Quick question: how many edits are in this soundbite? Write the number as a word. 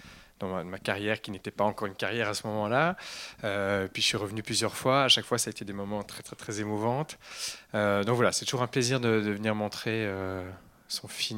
one